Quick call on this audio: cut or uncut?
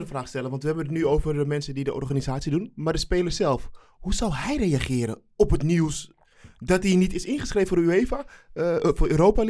uncut